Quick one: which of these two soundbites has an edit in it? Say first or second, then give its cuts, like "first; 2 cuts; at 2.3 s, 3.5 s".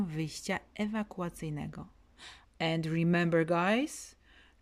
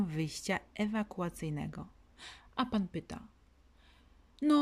first; 1 cut; at 2.4 s